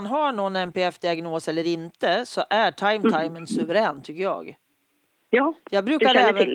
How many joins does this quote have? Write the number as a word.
zero